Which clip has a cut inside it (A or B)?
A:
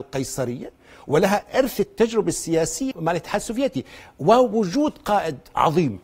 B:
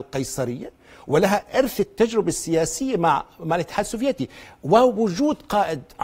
A